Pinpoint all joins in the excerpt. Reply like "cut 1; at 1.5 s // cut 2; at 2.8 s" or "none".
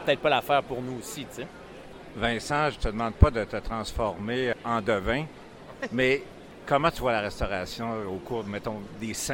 none